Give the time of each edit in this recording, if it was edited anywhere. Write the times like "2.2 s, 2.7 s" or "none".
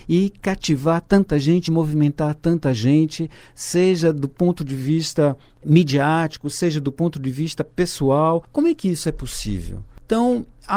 none